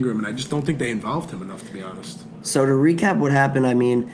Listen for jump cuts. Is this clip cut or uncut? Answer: uncut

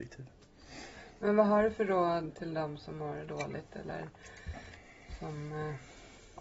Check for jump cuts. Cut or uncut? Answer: cut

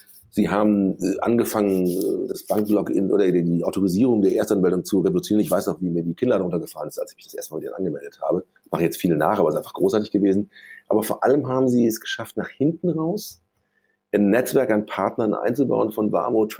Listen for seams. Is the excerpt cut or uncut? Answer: cut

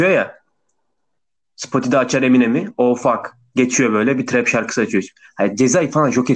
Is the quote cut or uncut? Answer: uncut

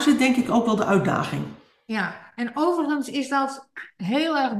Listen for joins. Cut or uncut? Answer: uncut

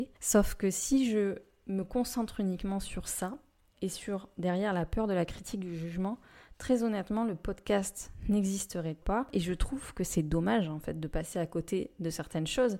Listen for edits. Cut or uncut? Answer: uncut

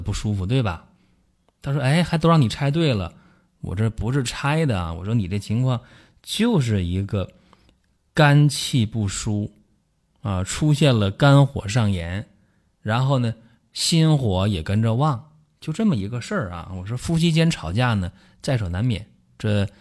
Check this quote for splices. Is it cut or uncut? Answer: uncut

